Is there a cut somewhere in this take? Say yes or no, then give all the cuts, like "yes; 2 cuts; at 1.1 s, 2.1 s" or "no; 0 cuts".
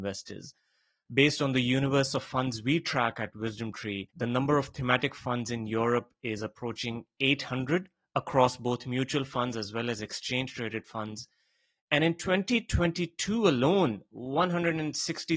no; 0 cuts